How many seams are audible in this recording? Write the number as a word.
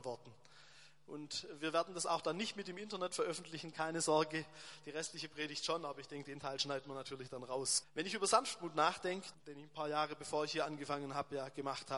two